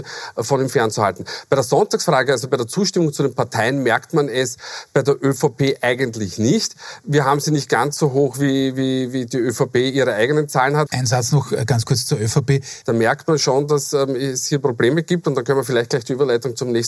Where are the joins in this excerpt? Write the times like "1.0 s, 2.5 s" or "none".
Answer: 10.9 s, 12.8 s